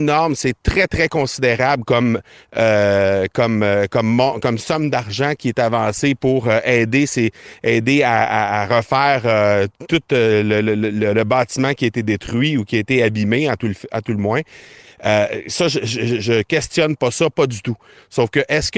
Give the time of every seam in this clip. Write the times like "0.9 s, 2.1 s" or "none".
none